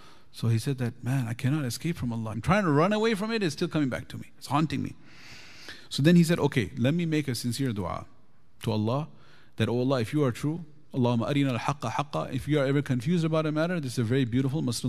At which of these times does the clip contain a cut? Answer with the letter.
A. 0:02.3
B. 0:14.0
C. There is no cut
A